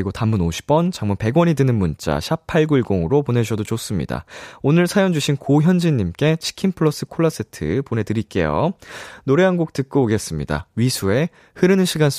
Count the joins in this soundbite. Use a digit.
0